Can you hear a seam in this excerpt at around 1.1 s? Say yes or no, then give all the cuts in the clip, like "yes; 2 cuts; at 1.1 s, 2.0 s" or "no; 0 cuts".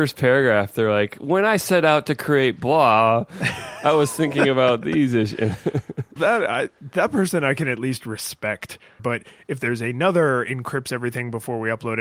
no; 2 cuts; at 6.2 s, 9.0 s